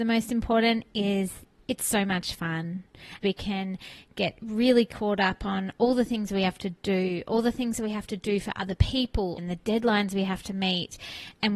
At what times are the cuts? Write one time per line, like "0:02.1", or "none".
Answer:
0:03.2
0:09.4